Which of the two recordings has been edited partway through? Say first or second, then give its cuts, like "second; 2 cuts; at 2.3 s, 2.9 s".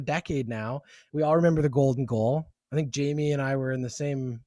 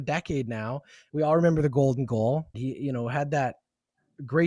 second; 1 cut; at 2.5 s